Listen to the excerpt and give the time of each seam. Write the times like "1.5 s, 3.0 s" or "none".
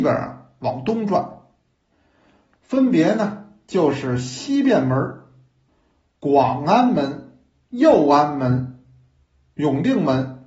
none